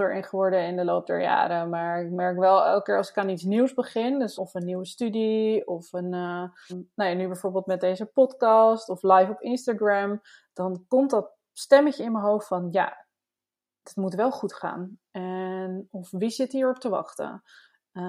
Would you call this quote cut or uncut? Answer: cut